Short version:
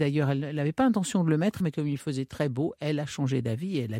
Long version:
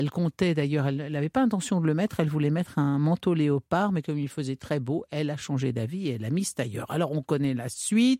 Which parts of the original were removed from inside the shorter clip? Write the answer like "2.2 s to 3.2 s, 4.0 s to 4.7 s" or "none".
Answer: 2.2 s to 3.9 s